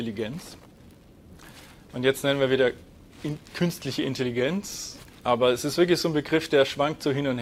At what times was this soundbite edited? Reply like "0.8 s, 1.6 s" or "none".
1.9 s, 5.2 s